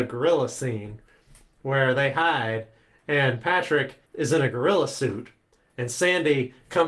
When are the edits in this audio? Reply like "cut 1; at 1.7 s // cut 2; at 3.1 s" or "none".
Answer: cut 1; at 4.1 s